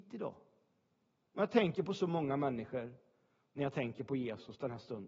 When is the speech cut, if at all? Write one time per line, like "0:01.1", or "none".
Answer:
0:01.2